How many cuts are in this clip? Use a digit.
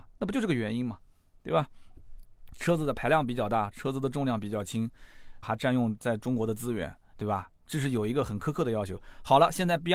2